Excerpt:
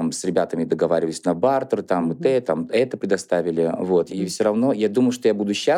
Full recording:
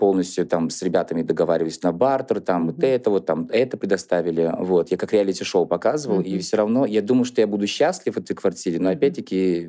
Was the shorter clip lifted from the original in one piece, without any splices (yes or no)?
no